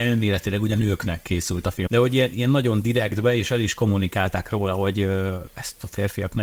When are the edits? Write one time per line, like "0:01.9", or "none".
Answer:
0:01.9